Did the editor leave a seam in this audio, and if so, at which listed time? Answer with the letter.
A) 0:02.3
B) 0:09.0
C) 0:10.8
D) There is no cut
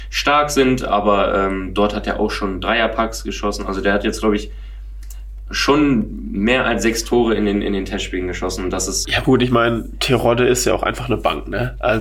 B